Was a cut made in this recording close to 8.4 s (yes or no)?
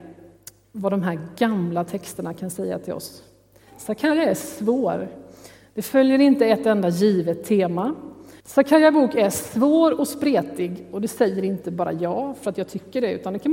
yes